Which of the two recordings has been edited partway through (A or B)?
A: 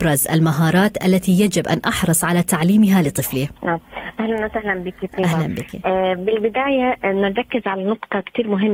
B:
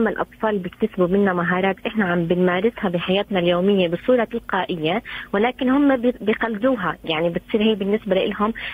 A